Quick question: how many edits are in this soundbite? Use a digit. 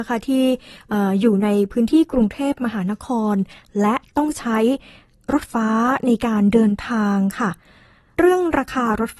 1